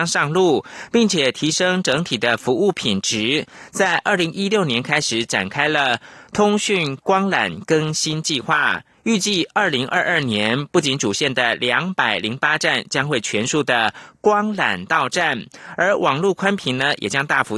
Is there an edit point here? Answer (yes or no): no